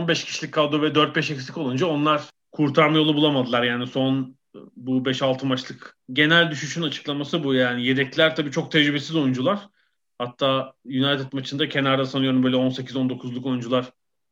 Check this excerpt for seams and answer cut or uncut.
uncut